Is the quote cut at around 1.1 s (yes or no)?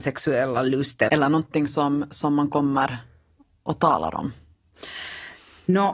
yes